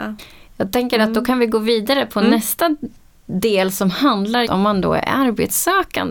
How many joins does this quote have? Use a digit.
1